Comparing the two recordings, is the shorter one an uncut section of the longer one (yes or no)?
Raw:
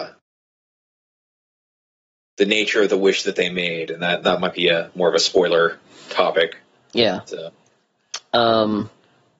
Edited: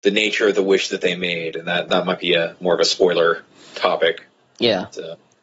yes